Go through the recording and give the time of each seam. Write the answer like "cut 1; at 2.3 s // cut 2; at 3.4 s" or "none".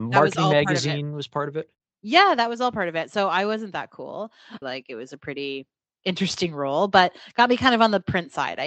cut 1; at 4.6 s